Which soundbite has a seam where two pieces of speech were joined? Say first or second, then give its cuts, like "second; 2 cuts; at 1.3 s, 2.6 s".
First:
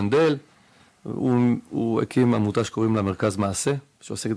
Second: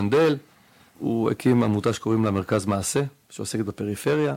second; 1 cut; at 1.0 s